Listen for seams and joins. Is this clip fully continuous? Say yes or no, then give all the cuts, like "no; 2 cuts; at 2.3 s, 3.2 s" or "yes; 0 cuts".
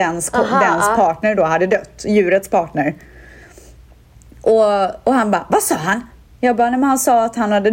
yes; 0 cuts